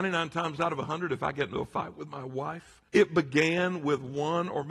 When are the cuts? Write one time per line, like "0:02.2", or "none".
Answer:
0:02.9